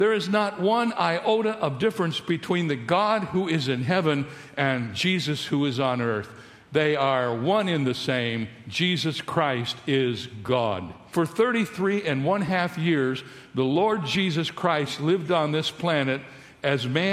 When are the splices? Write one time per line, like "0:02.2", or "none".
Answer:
none